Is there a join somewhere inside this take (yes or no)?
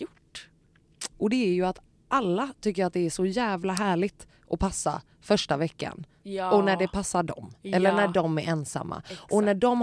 yes